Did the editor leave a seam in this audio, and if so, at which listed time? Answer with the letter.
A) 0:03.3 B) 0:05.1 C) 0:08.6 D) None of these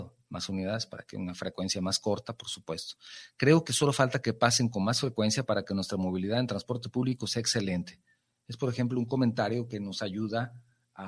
D